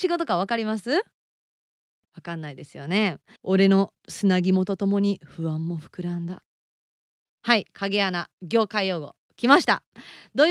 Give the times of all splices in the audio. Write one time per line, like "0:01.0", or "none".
0:03.4
0:07.2

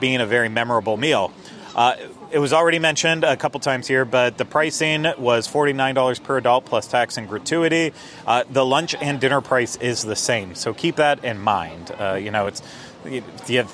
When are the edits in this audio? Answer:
none

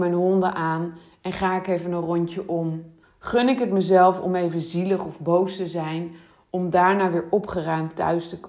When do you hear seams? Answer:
0:03.0

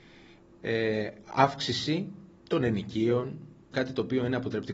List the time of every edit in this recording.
0:03.7

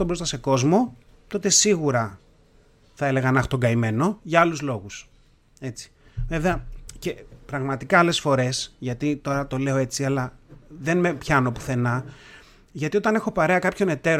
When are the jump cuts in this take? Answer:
none

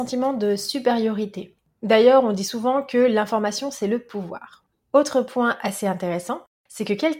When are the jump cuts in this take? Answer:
none

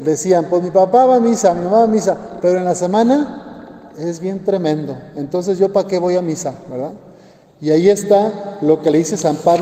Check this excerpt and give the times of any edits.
none

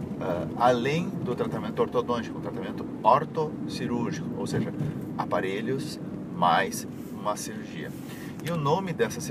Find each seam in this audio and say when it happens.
none

